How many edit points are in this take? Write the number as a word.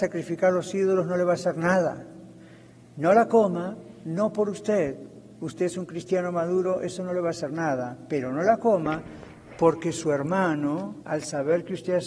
one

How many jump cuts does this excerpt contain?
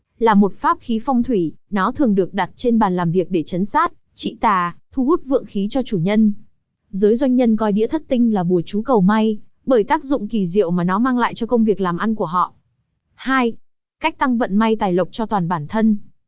zero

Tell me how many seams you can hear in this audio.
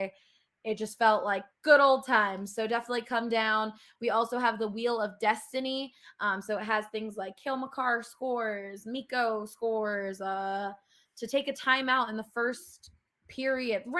zero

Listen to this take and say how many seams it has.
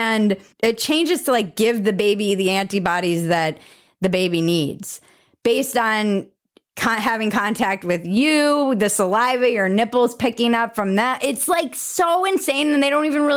zero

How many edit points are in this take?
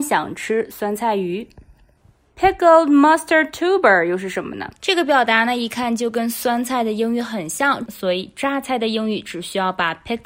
two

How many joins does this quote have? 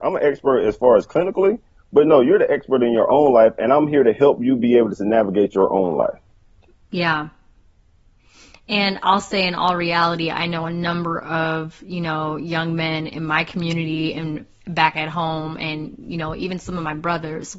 zero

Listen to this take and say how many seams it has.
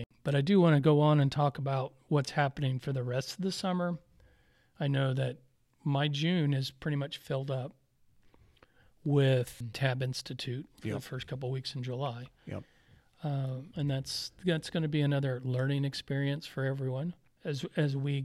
one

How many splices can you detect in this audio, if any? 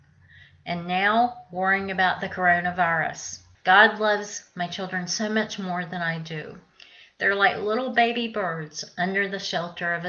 one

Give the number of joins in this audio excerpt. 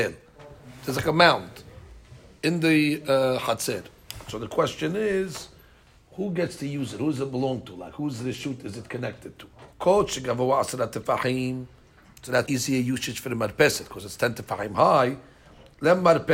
two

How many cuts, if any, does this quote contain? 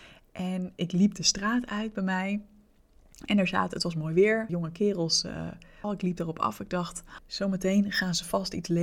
three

